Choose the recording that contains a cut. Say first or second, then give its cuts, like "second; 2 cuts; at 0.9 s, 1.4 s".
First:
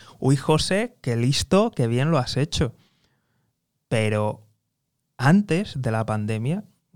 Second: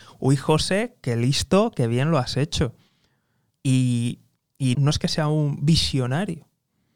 second; 2 cuts; at 3.5 s, 4.7 s